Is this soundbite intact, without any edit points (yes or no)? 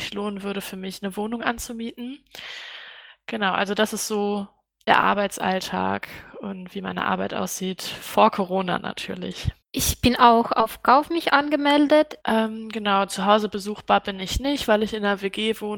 no